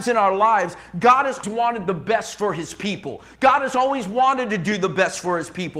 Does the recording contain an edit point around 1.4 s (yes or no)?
yes